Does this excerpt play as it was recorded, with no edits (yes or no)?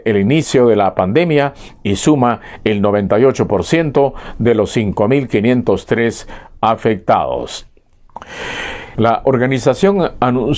no